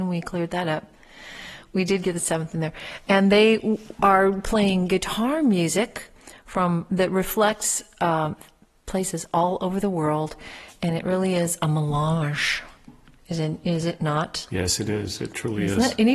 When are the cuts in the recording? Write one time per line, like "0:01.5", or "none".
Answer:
none